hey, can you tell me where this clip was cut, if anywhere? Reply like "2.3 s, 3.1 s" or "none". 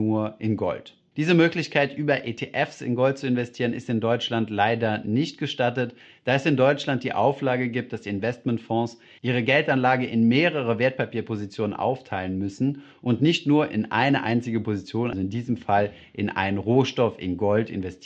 15.1 s